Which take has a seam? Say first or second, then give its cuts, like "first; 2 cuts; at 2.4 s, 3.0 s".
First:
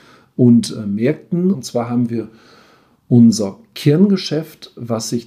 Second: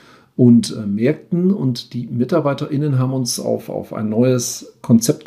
first; 1 cut; at 1.5 s